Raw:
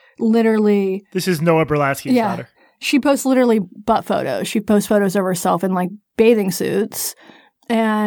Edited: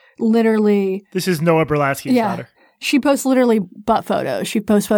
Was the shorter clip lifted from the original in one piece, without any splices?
yes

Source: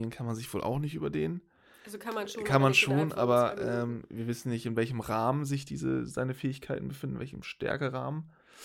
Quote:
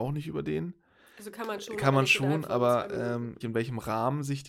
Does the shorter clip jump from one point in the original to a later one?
yes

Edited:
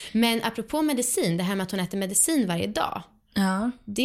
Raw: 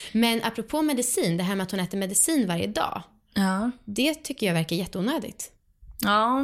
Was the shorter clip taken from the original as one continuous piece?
yes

